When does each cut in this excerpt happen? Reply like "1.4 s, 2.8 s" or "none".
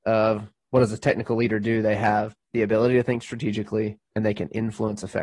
2.4 s